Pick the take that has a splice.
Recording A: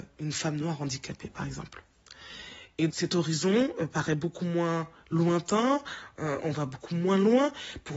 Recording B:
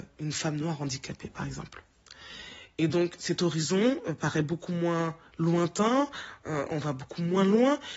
A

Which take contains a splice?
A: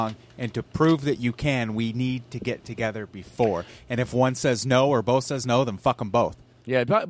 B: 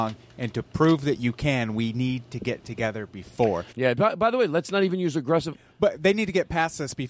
B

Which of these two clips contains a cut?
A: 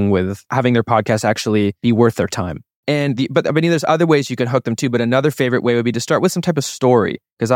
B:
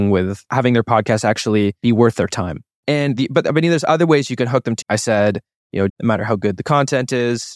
B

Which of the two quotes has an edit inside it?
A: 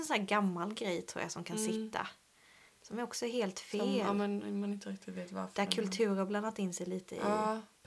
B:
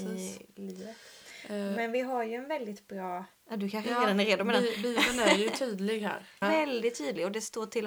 B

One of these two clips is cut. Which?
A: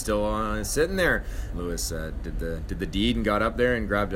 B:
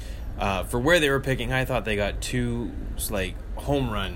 A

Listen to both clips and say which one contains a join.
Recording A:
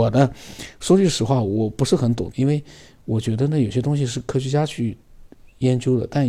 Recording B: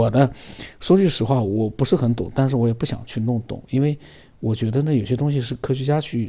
A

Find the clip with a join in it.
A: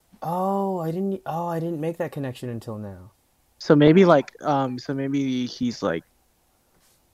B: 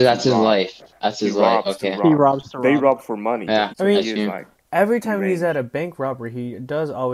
B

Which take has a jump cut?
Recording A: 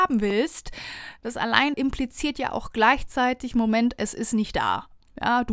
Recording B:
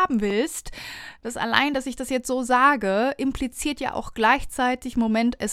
A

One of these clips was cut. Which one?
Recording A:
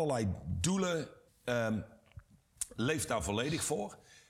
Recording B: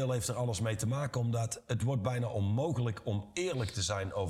A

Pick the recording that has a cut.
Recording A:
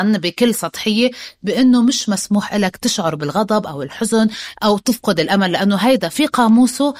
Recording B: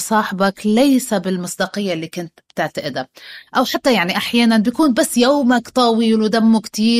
B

